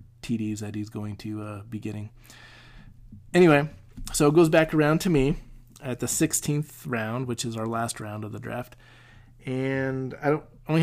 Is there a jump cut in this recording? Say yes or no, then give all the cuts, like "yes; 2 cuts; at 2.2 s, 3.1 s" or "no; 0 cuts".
no; 0 cuts